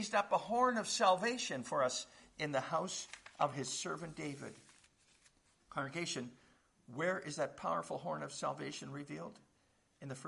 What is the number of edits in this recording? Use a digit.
1